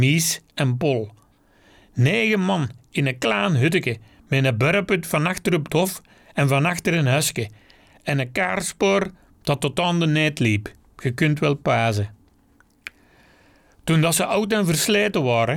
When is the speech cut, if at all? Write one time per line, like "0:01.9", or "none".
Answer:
none

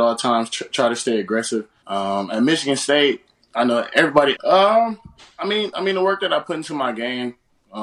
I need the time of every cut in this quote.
0:01.8
0:04.3

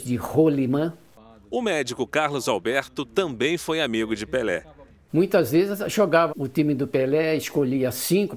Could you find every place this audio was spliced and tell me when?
0:05.1
0:06.3

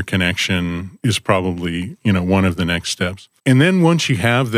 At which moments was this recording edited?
0:03.4

